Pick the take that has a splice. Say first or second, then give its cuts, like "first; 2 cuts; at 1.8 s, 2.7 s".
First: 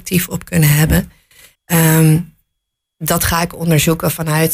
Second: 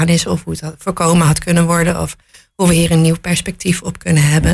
first; 1 cut; at 1.5 s